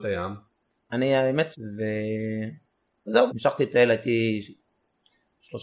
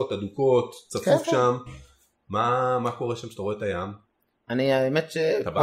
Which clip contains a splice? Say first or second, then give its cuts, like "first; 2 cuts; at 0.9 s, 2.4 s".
first; 2 cuts; at 1.5 s, 3.3 s